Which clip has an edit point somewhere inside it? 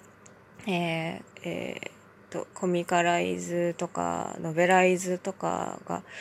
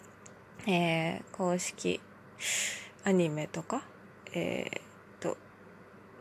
first; 2 cuts; at 1.3 s, 2.5 s

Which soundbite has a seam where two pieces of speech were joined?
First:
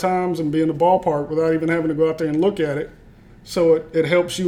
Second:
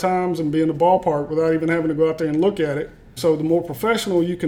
second; 1 cut; at 3.2 s

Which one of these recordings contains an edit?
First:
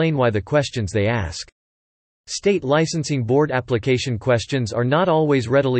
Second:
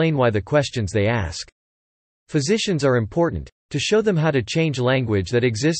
first; 1 cut; at 2.1 s

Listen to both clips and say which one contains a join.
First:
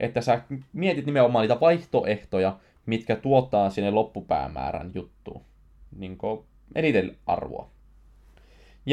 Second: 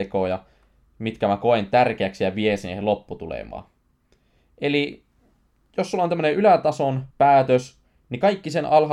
second; 1 cut; at 7.1 s

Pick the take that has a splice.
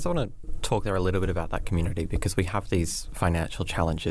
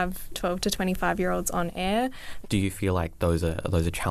second; 1 cut; at 2.4 s

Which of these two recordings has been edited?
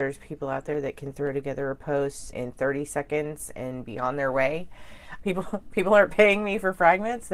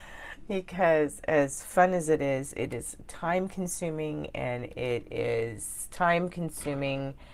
first; 2 cuts; at 2.3 s, 5.2 s

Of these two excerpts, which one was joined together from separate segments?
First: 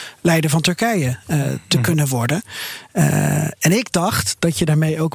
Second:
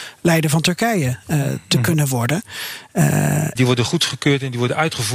second; 1 cut; at 3.6 s

